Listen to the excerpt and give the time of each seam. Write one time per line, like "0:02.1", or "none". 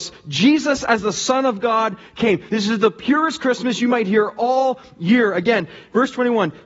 none